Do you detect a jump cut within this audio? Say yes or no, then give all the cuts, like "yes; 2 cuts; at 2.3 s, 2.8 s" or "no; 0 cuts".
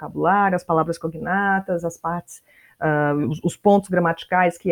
no; 0 cuts